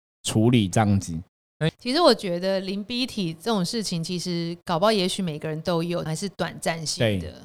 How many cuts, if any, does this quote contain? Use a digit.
2